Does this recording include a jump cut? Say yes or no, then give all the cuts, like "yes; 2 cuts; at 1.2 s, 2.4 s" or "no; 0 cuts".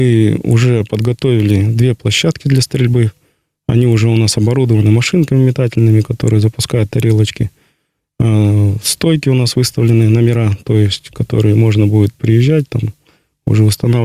no; 0 cuts